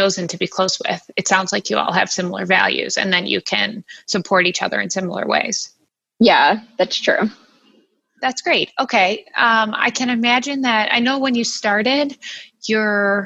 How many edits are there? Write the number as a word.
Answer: zero